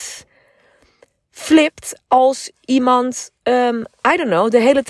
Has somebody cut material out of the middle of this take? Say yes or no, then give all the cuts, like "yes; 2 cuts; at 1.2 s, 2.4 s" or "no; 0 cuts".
no; 0 cuts